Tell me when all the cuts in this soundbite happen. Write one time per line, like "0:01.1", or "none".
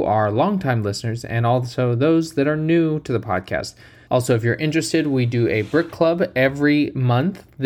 0:04.1